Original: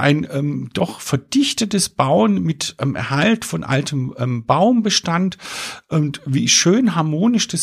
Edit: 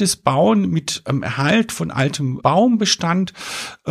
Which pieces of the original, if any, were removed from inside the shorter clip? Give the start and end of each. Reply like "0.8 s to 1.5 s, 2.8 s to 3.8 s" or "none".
4.1 s to 4.4 s